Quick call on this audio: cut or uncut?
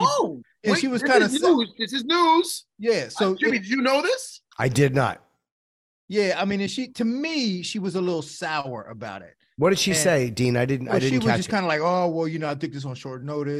uncut